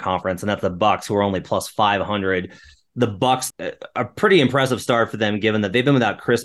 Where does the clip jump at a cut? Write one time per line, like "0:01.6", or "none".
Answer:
0:03.5